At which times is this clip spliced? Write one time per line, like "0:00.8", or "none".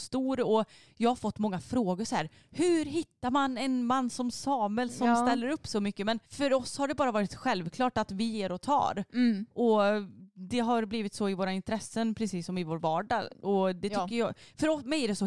0:06.2

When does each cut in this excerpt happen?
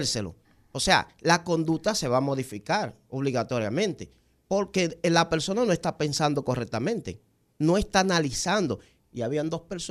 0:09.0

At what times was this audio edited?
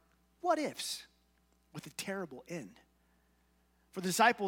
none

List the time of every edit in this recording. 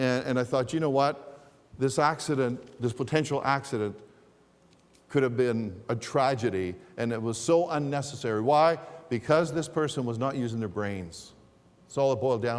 none

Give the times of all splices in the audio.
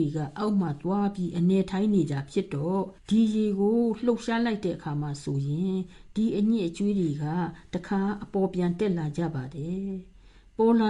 0:03.0

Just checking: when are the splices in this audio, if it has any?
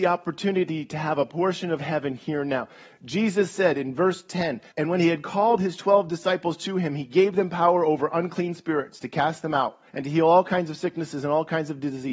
0:04.7
0:09.9

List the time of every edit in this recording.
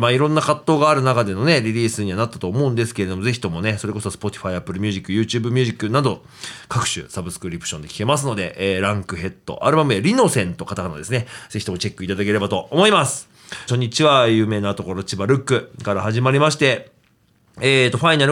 0:13.7

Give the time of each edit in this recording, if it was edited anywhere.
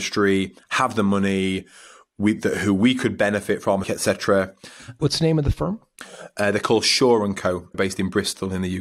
0:03.8
0:05.0
0:07.7

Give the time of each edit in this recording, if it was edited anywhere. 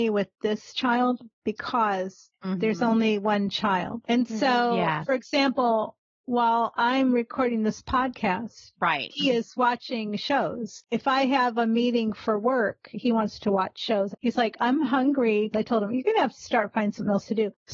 0:14.1
0:15.5

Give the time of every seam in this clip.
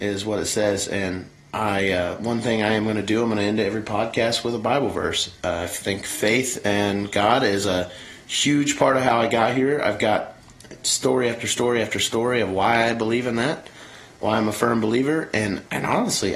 none

